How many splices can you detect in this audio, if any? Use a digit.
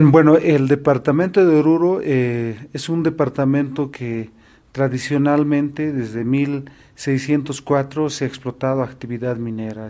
0